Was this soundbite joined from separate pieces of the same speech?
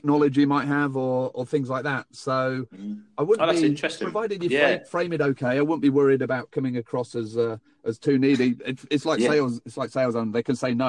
no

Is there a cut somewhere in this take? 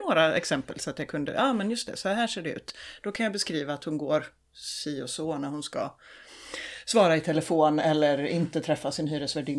no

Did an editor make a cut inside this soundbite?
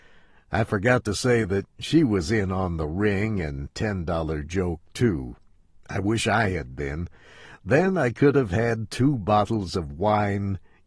no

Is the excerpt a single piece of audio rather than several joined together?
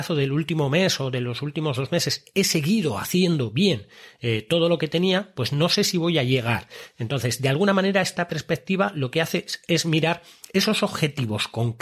yes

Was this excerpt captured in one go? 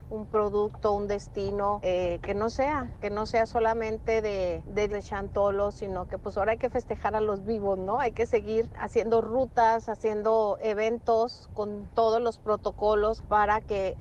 no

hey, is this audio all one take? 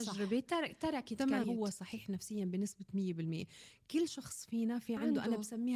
no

